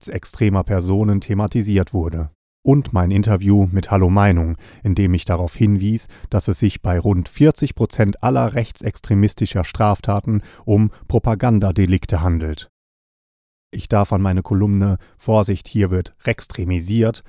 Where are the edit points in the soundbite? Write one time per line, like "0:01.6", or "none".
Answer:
0:13.6